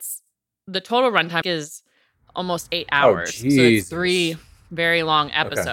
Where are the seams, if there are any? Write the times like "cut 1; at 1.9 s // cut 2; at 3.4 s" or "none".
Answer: cut 1; at 1.4 s